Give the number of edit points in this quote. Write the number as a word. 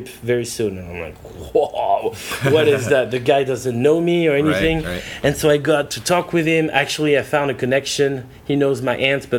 zero